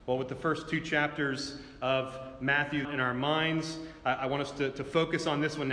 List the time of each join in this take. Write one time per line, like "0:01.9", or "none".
0:02.8